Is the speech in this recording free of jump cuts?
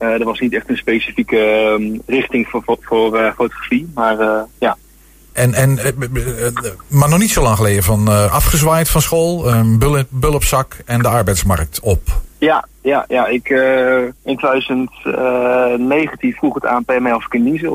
no; 3 cuts; at 5.3 s, 12.3 s, 14.2 s

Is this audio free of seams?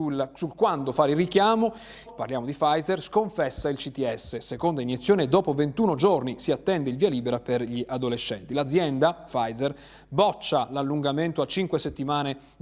no; 1 cut; at 2.1 s

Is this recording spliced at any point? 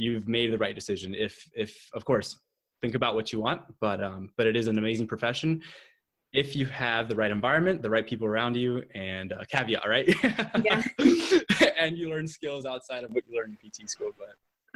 no; 0 cuts

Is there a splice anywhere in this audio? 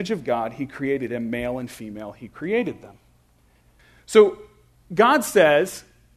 no; 0 cuts

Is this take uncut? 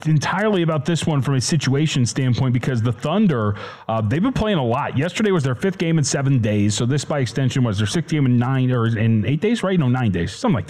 yes; 0 cuts

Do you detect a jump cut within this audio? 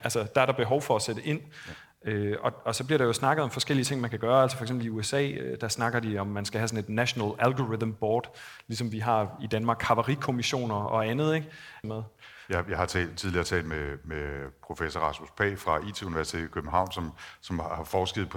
yes; 1 cut; at 11.8 s

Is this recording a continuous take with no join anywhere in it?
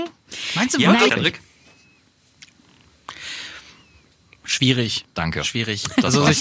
no; 1 cut; at 1.1 s

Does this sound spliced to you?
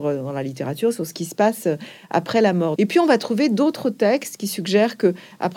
yes; 1 cut; at 2.8 s

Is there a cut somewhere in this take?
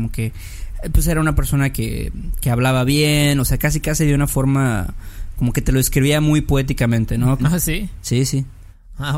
yes; 1 cut; at 7.4 s

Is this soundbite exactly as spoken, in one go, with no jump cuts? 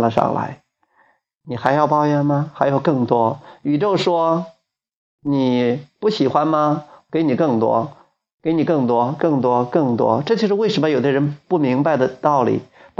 yes; 0 cuts

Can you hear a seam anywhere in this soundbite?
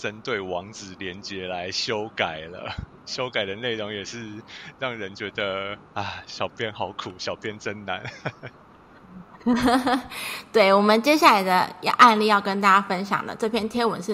no; 0 cuts

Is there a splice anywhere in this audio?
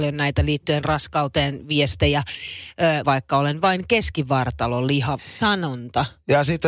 yes; 2 cuts; at 3.0 s, 5.2 s

